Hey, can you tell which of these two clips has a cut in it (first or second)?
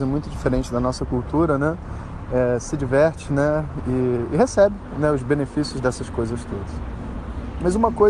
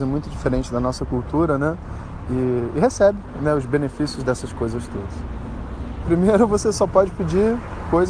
second